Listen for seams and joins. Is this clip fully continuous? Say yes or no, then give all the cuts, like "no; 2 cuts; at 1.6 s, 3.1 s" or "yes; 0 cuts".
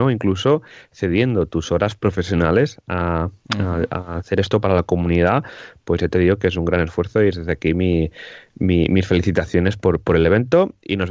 yes; 0 cuts